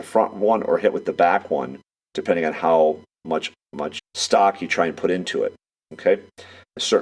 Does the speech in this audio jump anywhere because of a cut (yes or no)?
yes